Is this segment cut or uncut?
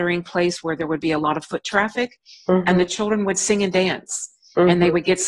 uncut